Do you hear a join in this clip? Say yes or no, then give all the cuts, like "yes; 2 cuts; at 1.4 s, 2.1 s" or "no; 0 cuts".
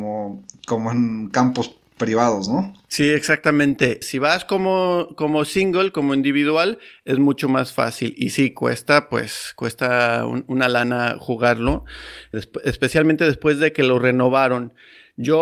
yes; 2 cuts; at 4.0 s, 12.3 s